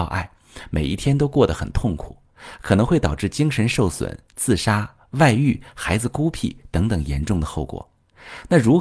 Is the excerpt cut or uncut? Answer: uncut